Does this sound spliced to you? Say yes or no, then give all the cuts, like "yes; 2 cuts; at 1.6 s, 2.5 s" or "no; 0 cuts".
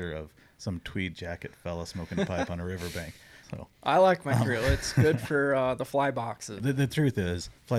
yes; 2 cuts; at 3.4 s, 6.6 s